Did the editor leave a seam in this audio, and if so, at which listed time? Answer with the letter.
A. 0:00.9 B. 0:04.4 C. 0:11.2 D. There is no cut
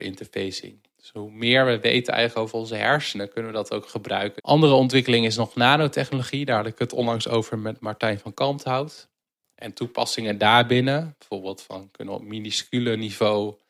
B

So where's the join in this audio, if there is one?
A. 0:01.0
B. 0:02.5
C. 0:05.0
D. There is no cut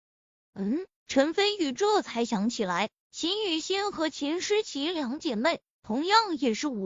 D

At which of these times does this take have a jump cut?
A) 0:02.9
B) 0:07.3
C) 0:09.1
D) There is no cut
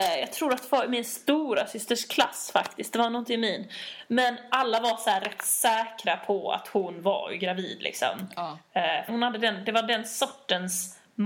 C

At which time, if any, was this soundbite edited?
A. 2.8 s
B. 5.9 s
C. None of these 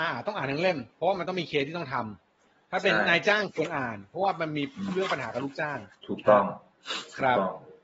B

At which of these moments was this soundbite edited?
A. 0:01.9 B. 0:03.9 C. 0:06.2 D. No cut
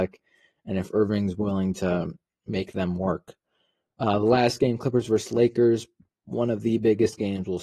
D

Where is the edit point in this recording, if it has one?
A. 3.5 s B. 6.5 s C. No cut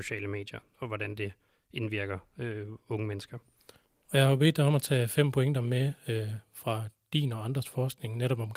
C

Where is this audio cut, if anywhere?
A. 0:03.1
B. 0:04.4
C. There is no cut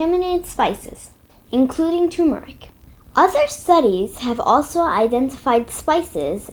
C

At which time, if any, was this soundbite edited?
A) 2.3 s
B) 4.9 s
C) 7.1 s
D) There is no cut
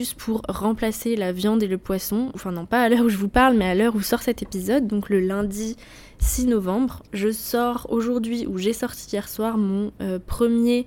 A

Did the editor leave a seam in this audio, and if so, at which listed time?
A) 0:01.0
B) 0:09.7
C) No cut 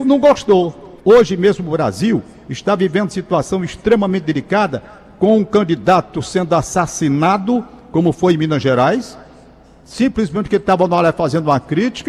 A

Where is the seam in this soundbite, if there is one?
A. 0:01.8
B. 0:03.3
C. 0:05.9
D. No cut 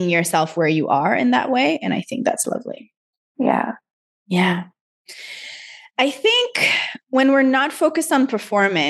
B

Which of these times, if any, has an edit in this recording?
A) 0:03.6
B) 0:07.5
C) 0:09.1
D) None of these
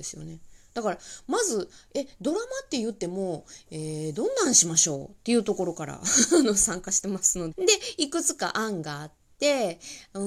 B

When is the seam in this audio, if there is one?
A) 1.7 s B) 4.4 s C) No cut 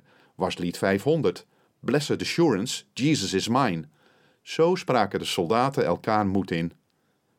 C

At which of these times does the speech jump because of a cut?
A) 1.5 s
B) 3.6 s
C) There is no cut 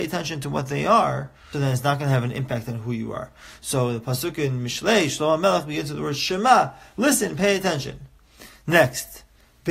A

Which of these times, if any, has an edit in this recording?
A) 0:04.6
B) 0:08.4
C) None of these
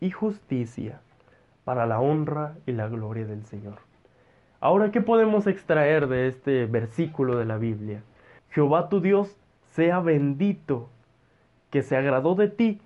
B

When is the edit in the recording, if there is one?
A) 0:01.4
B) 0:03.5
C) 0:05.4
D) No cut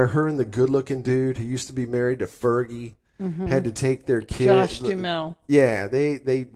D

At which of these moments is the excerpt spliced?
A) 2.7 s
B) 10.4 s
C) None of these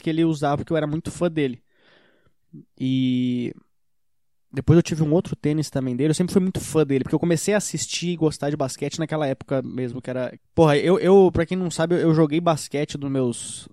B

